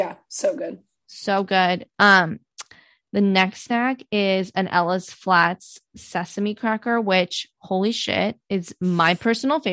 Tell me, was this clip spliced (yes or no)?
yes